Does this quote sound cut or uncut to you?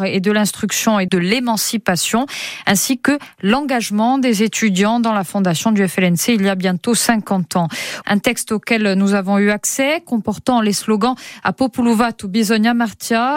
cut